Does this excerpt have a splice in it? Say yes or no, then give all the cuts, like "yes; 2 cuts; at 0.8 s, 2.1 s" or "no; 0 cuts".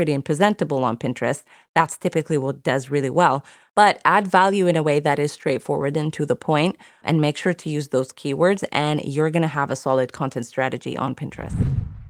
no; 0 cuts